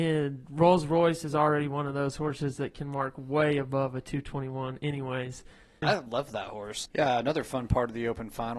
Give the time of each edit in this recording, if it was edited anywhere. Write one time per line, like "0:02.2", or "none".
0:05.8
0:06.9